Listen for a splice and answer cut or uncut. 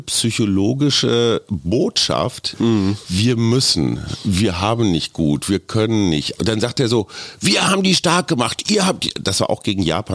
cut